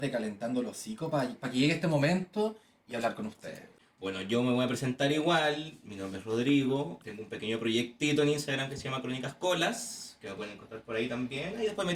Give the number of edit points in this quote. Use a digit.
1